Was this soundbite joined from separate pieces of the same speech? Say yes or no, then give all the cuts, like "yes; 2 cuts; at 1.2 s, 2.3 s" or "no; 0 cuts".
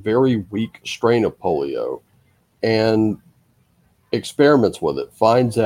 no; 0 cuts